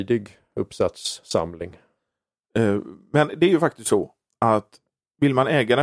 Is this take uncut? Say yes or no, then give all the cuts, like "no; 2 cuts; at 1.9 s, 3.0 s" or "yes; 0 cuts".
yes; 0 cuts